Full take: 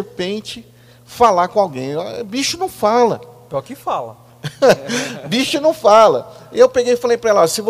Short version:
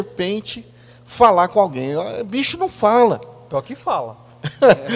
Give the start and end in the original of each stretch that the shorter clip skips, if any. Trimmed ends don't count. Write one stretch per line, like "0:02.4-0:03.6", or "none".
none